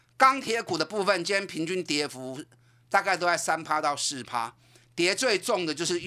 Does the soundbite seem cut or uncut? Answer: uncut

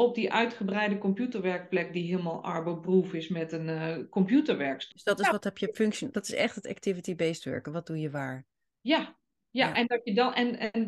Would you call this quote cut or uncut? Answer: cut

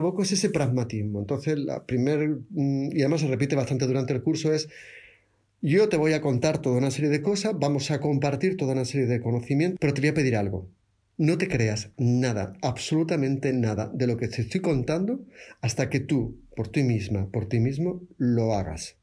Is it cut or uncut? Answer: cut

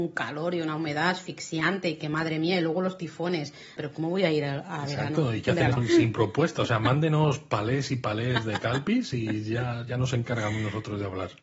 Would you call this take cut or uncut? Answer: cut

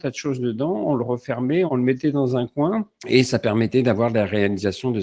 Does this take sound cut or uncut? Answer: cut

